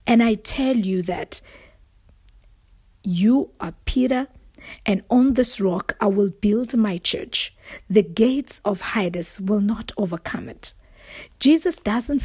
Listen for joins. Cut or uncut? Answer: uncut